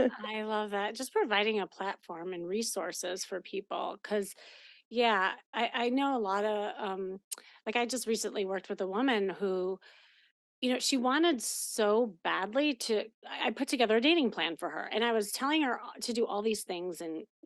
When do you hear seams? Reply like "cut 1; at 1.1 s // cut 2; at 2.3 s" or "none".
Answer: none